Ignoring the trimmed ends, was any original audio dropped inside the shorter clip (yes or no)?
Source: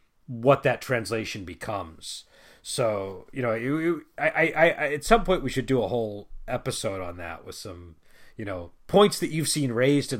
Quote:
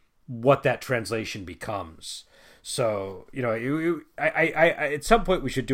no